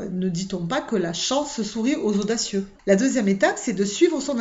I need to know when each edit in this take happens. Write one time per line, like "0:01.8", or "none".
0:02.7